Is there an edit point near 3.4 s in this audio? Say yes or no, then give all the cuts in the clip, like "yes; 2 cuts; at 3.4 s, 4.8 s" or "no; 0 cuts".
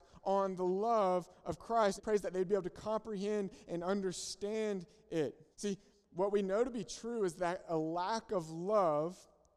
no; 2 cuts; at 2.0 s, 5.5 s